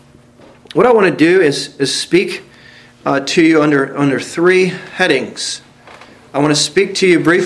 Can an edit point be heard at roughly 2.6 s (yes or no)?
no